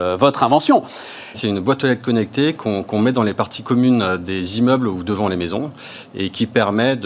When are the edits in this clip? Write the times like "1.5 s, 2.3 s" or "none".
1.3 s